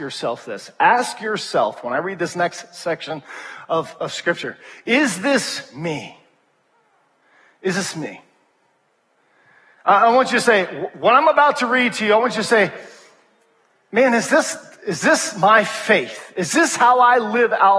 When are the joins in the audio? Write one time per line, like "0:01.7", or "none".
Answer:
0:04.0